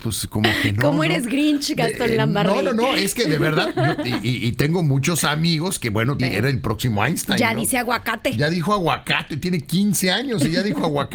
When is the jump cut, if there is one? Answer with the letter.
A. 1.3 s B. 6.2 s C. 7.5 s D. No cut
B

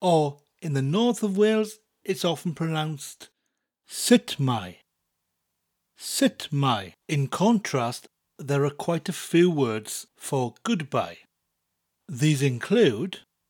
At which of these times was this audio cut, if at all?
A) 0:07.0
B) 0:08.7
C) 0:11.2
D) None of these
A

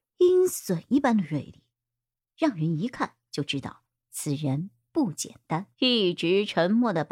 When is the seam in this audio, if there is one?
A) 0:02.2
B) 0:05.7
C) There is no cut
B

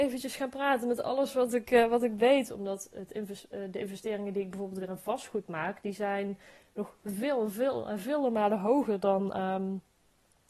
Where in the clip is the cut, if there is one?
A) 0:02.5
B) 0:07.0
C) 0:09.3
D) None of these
A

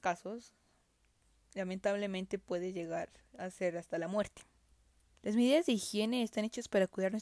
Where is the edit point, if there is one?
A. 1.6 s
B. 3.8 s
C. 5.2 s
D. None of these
C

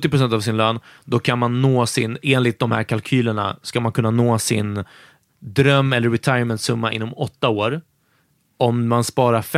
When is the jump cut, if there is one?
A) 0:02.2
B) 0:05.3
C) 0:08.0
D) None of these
B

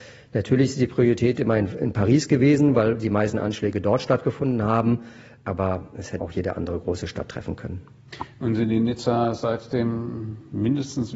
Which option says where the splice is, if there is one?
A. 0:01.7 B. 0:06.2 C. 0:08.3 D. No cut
B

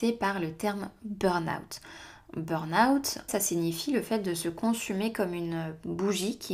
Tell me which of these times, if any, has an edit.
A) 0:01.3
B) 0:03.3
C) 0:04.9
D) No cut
B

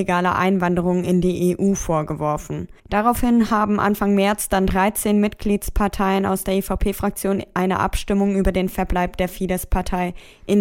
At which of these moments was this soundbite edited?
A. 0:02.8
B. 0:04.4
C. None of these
A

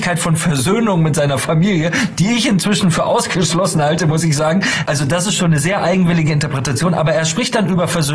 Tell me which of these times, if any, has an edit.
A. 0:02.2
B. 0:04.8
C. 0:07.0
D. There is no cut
B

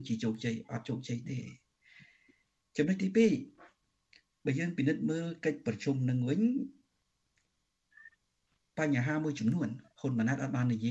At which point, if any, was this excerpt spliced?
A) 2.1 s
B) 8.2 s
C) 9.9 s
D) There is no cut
C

